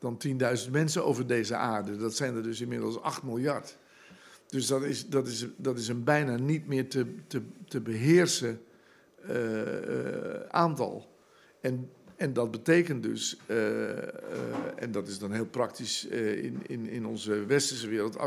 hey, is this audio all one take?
yes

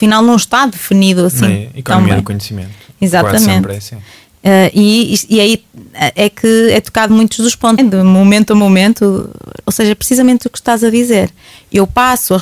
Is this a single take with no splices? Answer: no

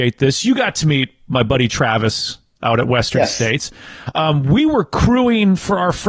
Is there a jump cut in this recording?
no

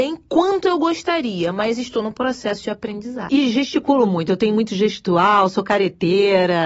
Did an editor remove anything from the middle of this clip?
yes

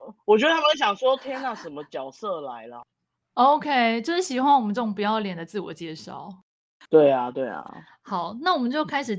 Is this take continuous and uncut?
yes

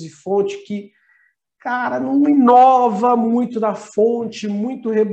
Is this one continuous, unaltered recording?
yes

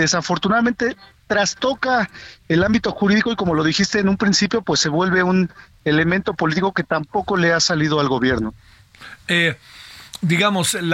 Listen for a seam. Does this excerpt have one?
no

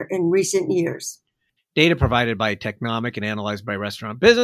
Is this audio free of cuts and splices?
no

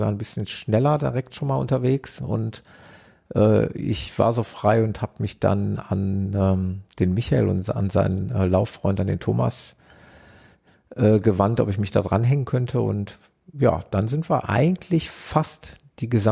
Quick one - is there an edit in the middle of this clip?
no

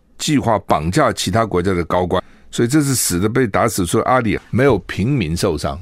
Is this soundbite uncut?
no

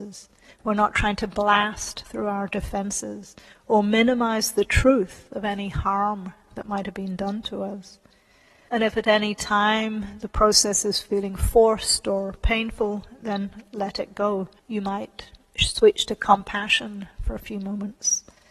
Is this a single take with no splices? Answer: no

